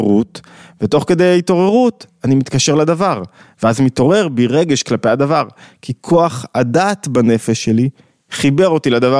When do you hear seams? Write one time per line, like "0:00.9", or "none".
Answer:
none